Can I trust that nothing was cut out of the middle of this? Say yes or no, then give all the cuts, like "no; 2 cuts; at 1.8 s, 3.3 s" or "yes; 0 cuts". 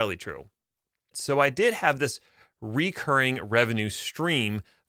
no; 1 cut; at 1.1 s